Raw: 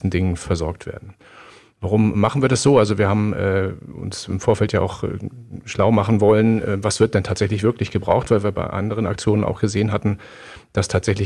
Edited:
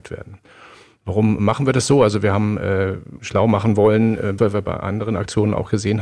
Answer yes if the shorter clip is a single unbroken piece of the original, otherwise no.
no